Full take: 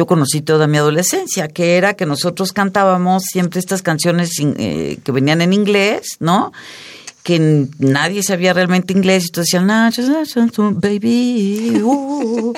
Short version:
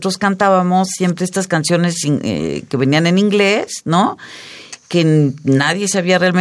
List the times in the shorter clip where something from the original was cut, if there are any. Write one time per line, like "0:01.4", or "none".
none